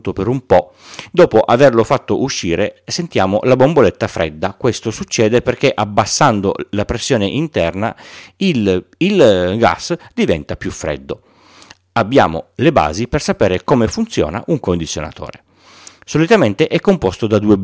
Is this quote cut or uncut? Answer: uncut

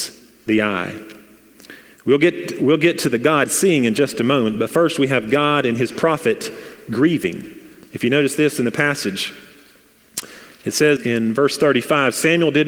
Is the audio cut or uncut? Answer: cut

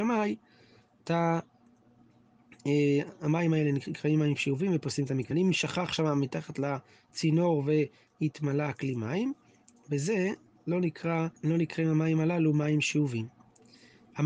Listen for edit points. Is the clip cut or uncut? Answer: cut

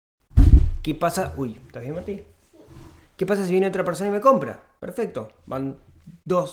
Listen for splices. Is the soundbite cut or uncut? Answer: uncut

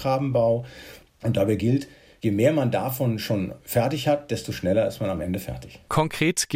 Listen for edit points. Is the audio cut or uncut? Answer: uncut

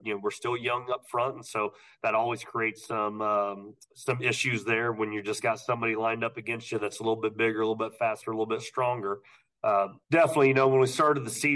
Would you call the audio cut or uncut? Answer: cut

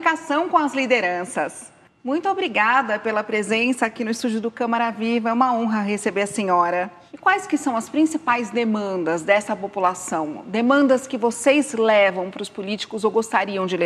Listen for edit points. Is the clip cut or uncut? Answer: uncut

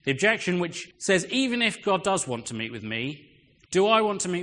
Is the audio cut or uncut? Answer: cut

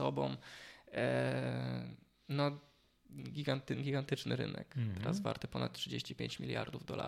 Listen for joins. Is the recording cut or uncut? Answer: uncut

